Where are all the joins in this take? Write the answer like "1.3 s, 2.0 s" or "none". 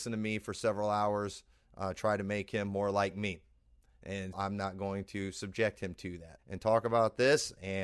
4.3 s, 6.4 s